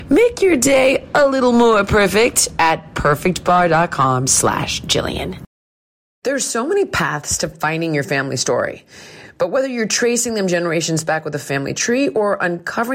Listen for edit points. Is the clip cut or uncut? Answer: uncut